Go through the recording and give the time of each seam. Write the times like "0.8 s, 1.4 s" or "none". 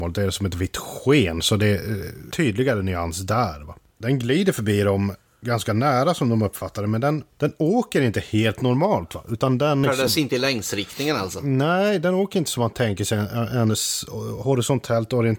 9.8 s